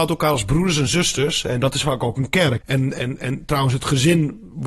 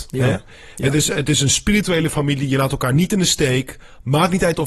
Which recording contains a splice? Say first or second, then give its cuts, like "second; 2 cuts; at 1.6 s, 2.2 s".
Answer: first; 1 cut; at 2.6 s